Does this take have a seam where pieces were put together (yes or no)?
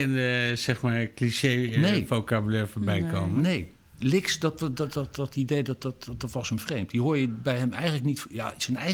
no